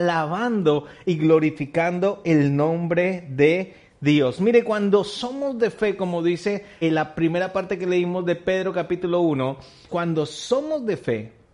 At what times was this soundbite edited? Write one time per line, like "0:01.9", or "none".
0:06.8
0:09.9

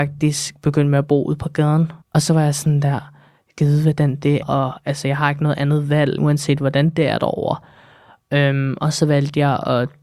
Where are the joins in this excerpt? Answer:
0:02.0
0:04.4
0:06.2

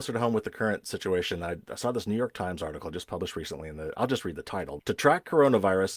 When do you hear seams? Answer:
0:04.8

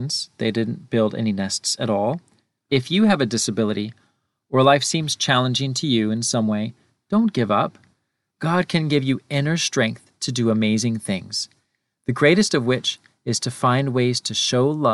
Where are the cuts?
0:02.6

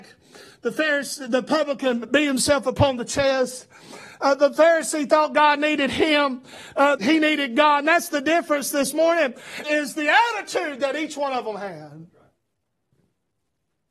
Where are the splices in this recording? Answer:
0:07.0
0:09.6

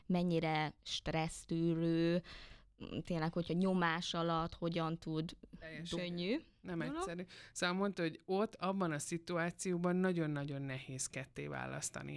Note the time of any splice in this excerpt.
0:06.0
0:07.5

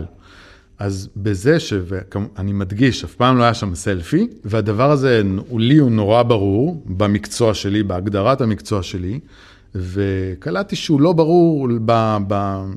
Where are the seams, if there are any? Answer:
0:04.4

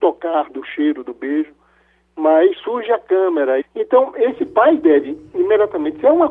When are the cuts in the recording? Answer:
0:03.6

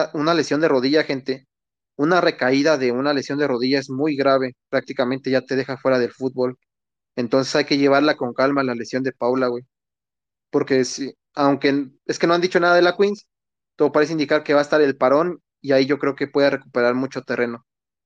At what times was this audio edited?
0:10.4

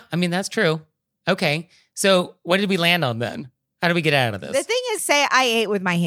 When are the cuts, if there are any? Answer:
0:05.0

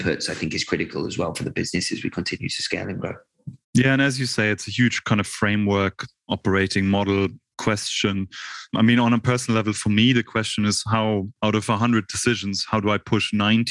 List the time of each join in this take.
0:03.6

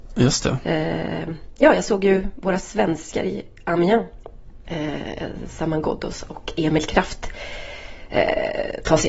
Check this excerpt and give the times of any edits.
0:04.6

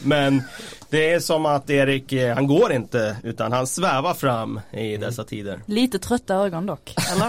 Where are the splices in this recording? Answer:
none

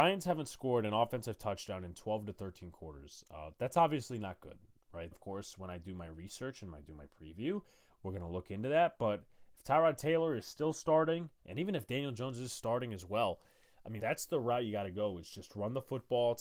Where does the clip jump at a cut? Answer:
0:05.1
0:14.0

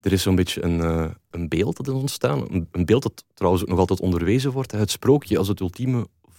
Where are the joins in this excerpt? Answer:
none

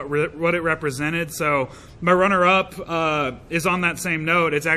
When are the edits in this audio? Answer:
none

